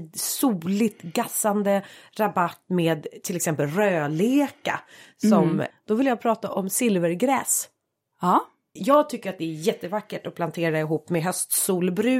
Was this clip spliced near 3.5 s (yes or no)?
no